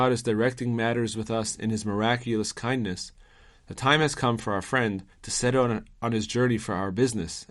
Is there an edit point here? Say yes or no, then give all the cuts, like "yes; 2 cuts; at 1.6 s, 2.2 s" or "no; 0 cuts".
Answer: yes; 1 cut; at 5.1 s